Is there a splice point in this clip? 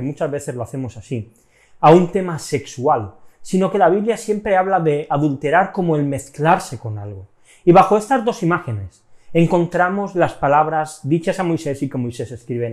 no; 0 cuts

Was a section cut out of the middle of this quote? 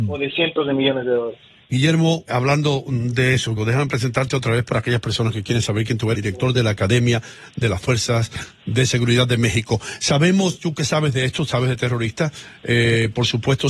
yes; 3 cuts; at 2.3 s, 3.6 s, 6.1 s

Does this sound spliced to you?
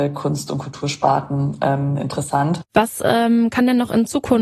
no; 0 cuts

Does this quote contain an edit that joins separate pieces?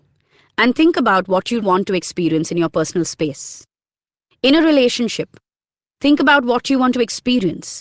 yes; 1 cut; at 1.6 s

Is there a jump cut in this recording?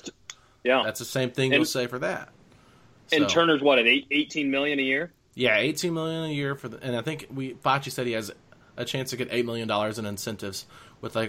no; 0 cuts

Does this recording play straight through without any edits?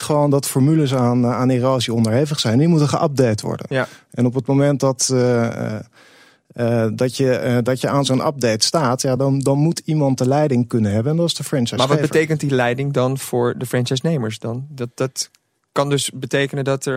yes; 0 cuts

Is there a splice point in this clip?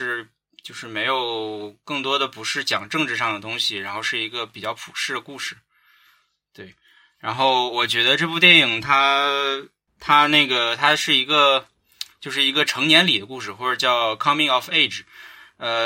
no; 0 cuts

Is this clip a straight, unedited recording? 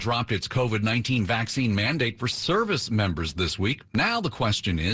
yes; 0 cuts

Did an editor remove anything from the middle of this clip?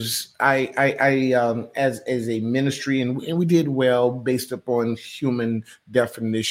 no; 0 cuts

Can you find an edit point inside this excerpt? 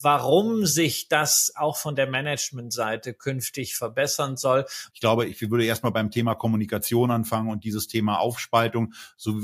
yes; 1 cut; at 4.9 s

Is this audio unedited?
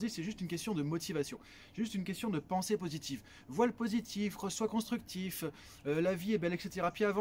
yes; 0 cuts

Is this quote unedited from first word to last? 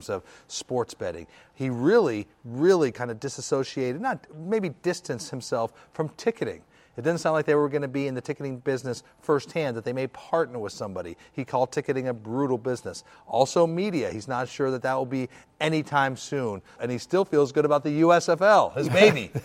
no; 1 cut; at 16.8 s

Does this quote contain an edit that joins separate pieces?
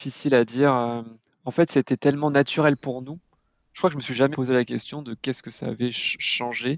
yes; 1 cut; at 4.3 s

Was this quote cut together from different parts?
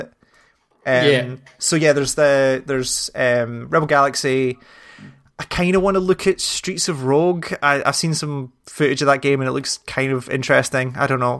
no; 0 cuts

